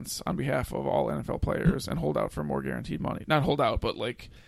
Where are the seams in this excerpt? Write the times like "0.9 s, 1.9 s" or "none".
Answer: none